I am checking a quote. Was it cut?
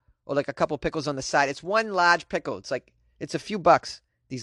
no; 0 cuts

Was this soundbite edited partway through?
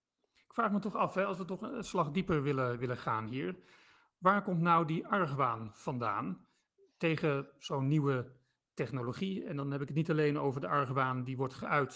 no; 0 cuts

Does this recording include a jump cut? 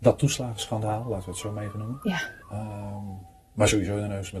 yes; 1 cut; at 2.4 s

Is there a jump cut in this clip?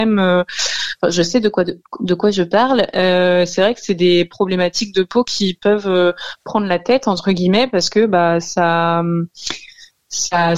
no; 0 cuts

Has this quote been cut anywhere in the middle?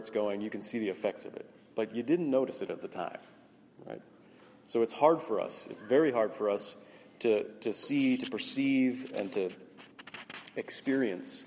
no; 0 cuts

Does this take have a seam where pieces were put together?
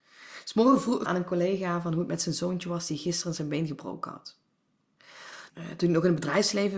yes; 2 cuts; at 1.1 s, 5.5 s

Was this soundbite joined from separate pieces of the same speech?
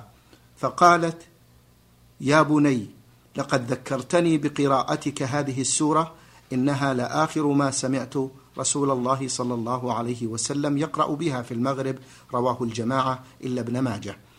no; 0 cuts

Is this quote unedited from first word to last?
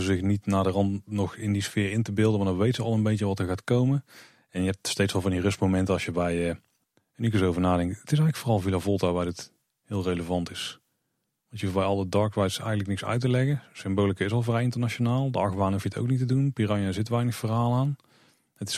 yes; 0 cuts

